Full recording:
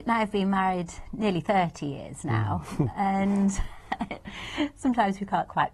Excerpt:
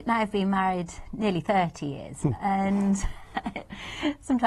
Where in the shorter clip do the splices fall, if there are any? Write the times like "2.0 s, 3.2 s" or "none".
2.2 s